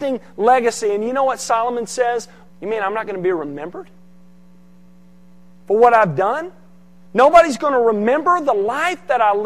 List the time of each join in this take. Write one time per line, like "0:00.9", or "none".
0:02.5

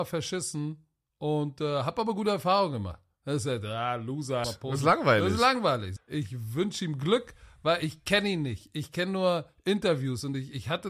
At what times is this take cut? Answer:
0:04.4
0:06.0

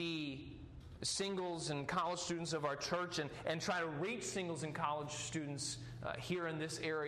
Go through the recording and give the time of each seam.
none

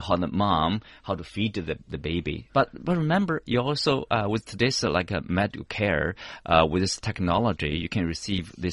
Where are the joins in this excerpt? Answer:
0:02.5

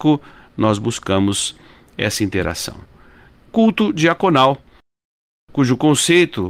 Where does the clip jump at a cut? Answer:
none

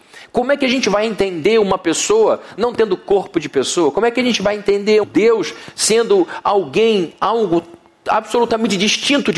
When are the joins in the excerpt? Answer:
0:05.0

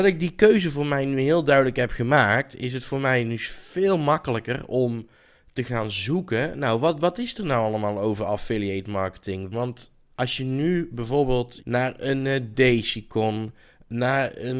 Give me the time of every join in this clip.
0:09.5
0:11.6

